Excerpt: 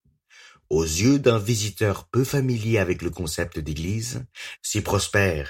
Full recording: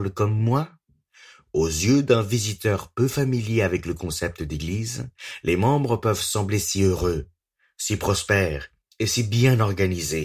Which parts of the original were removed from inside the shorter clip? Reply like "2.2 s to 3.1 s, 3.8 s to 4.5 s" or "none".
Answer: 5.4 s to 7.7 s